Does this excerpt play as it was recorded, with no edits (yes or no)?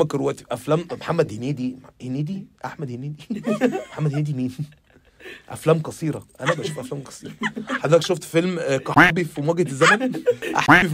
yes